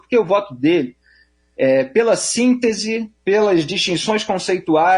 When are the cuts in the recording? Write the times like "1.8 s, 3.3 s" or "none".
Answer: 3.2 s